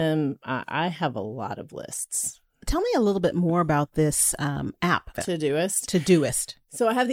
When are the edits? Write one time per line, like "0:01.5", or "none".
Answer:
0:05.1

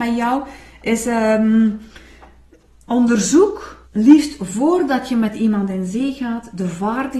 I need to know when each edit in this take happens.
0:03.9

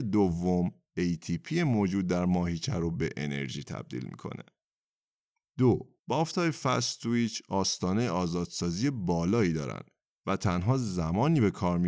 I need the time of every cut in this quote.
0:06.0

